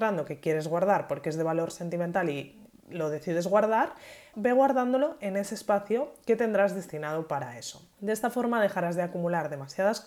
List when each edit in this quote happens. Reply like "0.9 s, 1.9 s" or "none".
4.3 s, 7.9 s